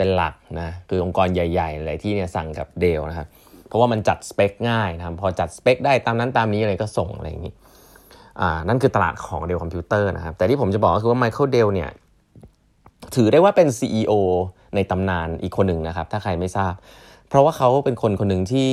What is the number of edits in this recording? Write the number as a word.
zero